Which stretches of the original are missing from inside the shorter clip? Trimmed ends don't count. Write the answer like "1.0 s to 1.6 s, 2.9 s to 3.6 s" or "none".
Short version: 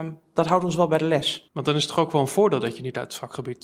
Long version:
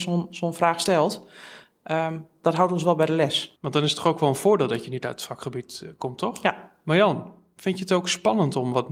none